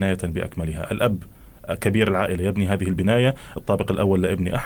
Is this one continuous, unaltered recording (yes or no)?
yes